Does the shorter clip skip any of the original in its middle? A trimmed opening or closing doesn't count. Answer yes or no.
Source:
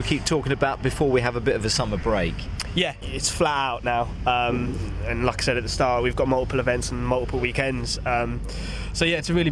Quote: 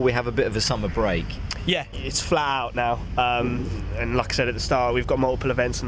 no